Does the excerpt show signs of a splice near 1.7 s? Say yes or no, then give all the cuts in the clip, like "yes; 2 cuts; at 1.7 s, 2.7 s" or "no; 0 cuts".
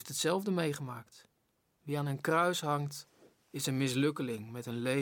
yes; 1 cut; at 1.7 s